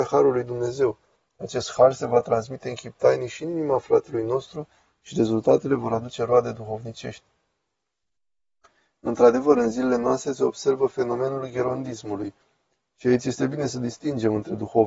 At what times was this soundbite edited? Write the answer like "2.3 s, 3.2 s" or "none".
none